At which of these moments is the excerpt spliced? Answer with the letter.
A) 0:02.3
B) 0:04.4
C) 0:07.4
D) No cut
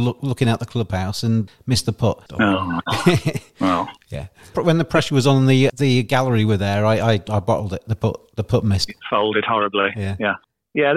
D